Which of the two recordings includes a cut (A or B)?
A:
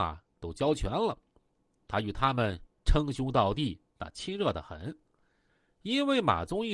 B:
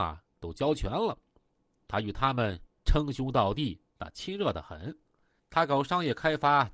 B